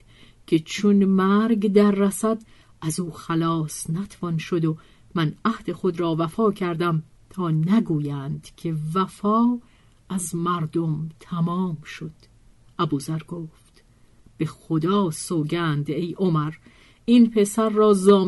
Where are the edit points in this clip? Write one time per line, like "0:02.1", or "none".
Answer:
none